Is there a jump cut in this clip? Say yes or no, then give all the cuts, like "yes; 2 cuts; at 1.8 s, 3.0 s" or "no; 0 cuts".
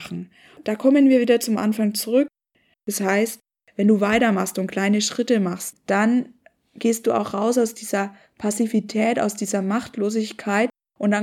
yes; 1 cut; at 2.7 s